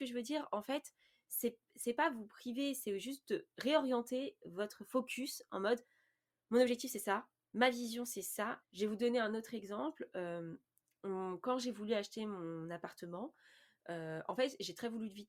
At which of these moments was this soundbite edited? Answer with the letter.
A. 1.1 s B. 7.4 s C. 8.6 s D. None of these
C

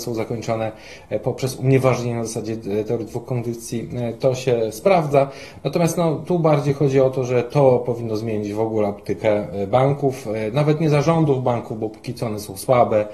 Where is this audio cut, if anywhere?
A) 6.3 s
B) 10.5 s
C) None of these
C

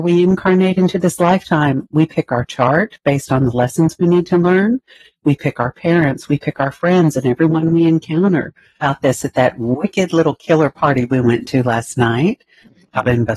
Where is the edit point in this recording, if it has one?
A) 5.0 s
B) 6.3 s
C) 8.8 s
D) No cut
C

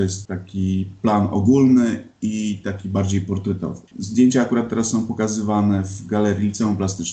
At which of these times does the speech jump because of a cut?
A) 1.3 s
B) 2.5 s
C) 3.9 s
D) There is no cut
C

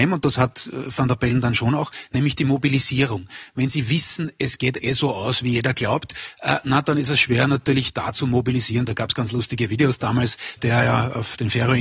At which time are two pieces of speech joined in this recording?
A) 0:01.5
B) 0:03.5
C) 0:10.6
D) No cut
C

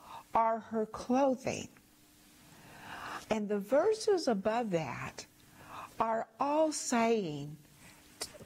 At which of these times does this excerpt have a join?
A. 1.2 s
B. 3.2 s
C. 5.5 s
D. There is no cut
B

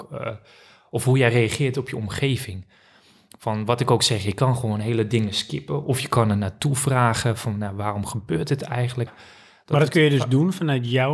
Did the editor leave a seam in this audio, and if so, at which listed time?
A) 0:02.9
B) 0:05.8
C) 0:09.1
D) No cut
C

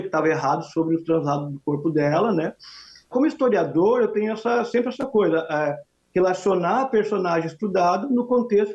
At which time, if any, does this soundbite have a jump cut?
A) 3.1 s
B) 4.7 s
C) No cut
A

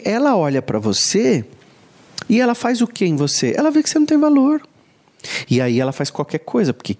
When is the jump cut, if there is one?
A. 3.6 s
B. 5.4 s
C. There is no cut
C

